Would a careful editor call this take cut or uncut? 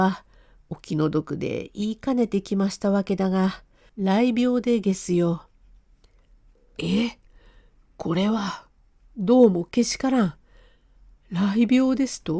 cut